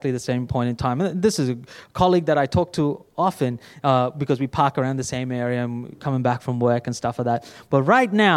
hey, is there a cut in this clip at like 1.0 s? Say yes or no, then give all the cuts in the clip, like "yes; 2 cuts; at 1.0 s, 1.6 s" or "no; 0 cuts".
no; 0 cuts